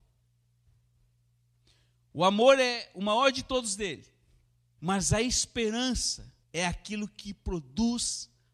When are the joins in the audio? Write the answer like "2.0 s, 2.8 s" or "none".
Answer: 4.8 s, 6.4 s